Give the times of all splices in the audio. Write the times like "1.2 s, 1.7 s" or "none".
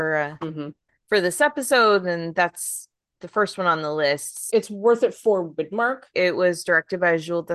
4.5 s, 6.1 s